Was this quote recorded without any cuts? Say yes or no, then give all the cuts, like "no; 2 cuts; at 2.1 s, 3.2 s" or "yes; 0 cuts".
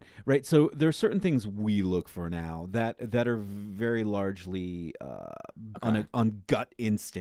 no; 1 cut; at 5.7 s